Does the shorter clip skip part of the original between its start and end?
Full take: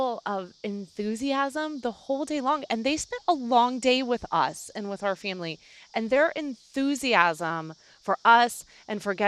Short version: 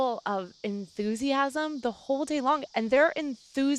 yes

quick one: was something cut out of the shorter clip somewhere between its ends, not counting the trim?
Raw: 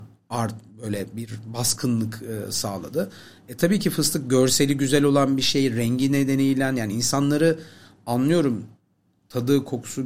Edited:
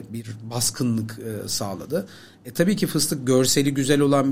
no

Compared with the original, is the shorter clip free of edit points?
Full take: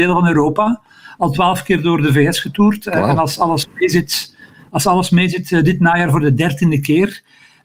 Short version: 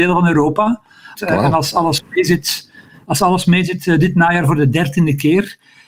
no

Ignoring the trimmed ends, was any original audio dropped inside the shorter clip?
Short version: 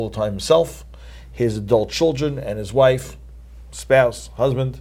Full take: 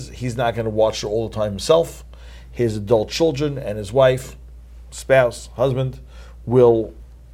no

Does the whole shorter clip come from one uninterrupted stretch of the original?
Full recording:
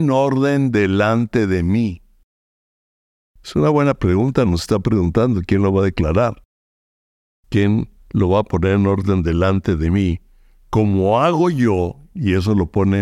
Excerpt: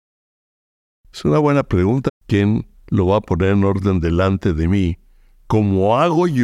no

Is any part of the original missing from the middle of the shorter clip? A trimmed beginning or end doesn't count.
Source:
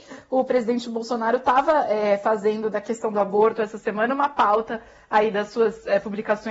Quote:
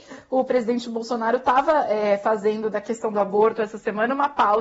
no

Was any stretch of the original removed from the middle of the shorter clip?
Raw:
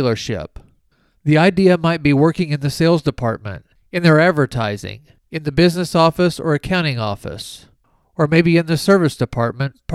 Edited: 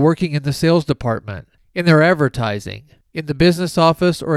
no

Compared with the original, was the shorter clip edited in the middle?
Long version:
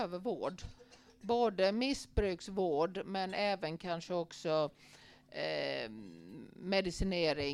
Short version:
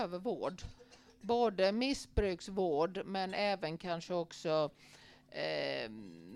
no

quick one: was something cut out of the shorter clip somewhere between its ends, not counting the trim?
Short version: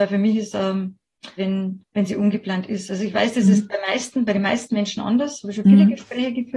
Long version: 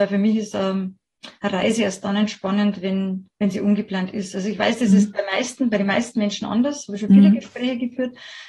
yes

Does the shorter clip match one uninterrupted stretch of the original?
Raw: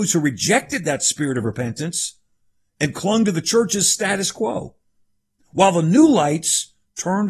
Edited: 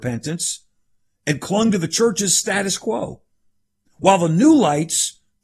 yes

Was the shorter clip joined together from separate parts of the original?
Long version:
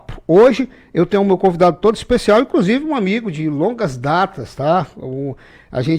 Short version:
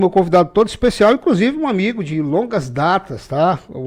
no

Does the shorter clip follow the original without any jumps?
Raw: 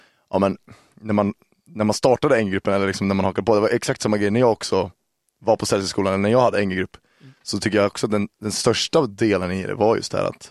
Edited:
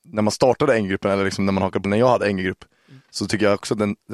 no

